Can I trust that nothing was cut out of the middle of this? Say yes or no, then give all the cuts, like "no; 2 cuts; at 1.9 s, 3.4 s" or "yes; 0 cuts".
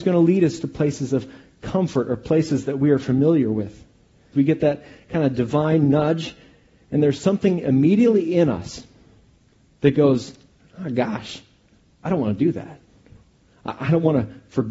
no; 1 cut; at 4.3 s